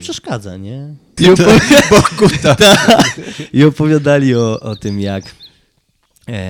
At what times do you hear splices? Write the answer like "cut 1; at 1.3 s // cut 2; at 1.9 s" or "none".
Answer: cut 1; at 1.2 s